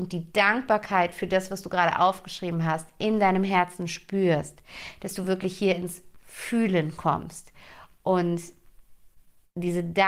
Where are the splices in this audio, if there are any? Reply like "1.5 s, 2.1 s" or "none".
none